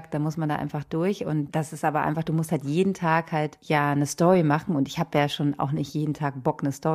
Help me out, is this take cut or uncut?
uncut